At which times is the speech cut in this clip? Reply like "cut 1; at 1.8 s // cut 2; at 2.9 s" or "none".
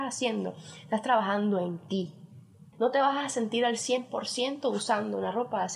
cut 1; at 2.7 s